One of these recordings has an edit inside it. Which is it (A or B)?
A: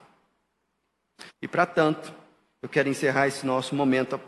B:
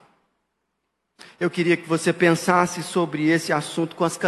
A